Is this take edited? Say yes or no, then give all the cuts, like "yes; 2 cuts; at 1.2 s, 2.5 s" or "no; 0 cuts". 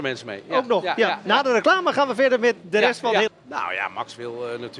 yes; 1 cut; at 3.3 s